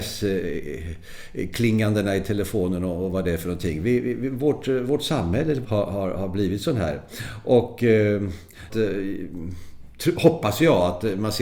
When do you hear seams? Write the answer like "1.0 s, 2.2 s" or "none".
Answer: 5.6 s, 8.7 s

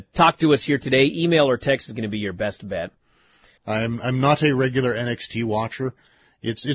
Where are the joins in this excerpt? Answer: 3.6 s

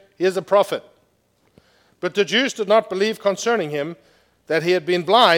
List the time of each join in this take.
none

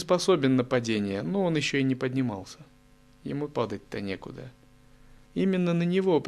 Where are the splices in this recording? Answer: 5.2 s

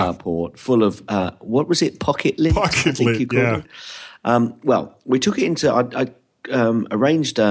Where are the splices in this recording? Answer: none

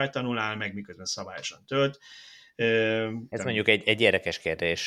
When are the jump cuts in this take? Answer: 3.3 s

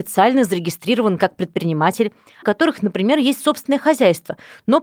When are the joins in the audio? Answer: 2.4 s

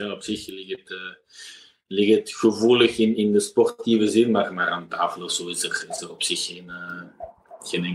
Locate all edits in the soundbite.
3.1 s

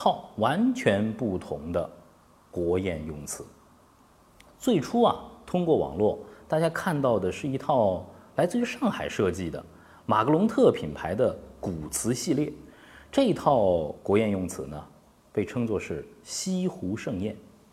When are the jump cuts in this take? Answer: none

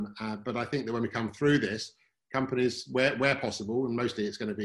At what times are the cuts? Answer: none

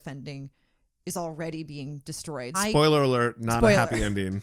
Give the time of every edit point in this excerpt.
2.5 s

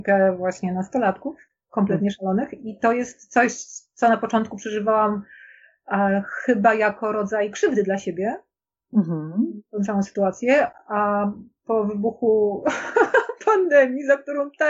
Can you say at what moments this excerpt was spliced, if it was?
none

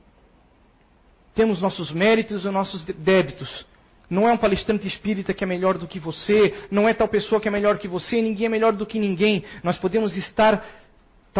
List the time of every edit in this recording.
4.0 s

